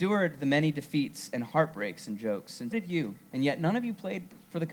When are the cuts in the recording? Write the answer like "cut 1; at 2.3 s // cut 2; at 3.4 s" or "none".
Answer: cut 1; at 2.7 s